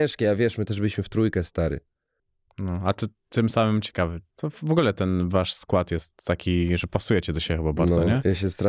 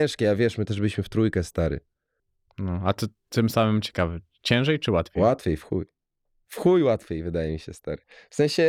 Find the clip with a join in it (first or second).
first